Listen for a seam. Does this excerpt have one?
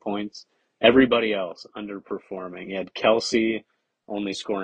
no; 0 cuts

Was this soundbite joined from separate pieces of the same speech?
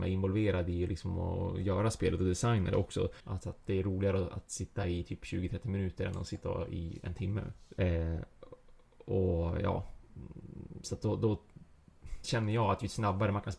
yes; 3 cuts; at 3.2 s, 7.8 s, 12.2 s

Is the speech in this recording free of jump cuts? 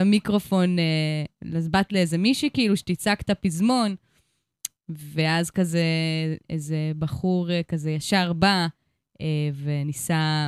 no; 1 cut; at 6.4 s

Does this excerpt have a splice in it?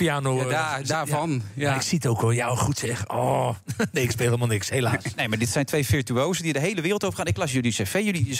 no; 0 cuts

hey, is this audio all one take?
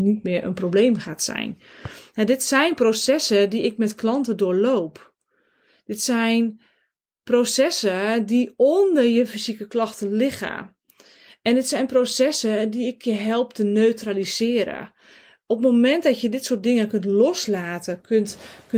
yes; 0 cuts

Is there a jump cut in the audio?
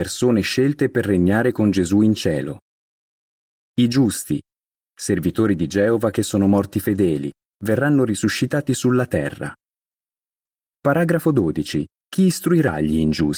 yes; 2 cuts; at 10.7 s, 11.9 s

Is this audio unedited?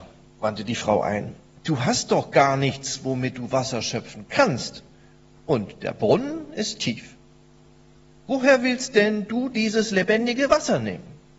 yes; 0 cuts

